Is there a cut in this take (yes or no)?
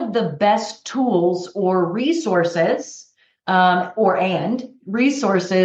no